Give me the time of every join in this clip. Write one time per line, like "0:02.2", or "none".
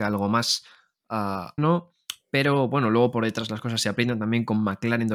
0:01.6